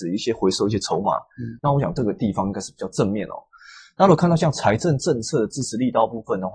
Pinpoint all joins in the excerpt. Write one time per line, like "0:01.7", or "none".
0:01.6